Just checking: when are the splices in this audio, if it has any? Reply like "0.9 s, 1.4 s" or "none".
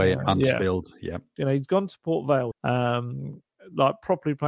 1.4 s, 2.5 s